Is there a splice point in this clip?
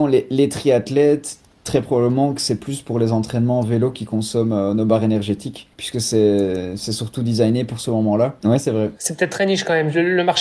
yes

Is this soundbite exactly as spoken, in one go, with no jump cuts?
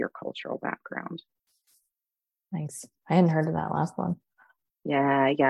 yes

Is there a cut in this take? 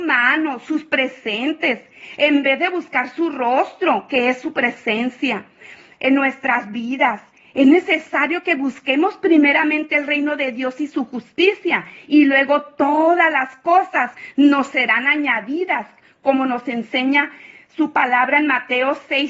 no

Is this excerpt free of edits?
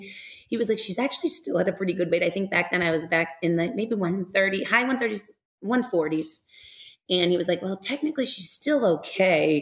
yes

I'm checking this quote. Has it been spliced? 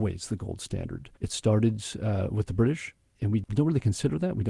yes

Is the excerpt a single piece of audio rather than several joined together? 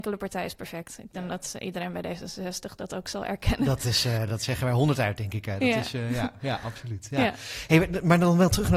yes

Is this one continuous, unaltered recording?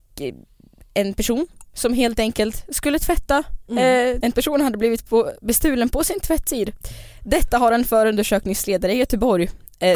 no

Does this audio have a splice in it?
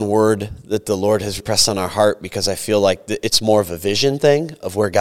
yes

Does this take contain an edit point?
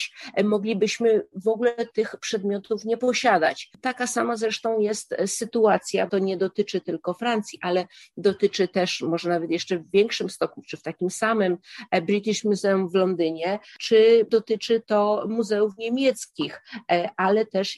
yes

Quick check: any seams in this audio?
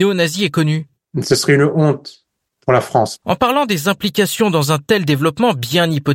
yes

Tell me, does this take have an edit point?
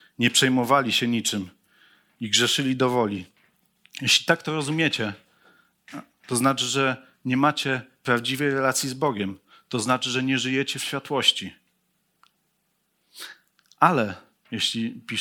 no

